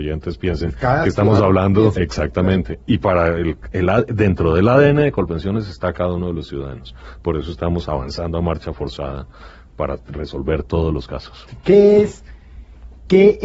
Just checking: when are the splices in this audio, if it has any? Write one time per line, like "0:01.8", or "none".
0:01.9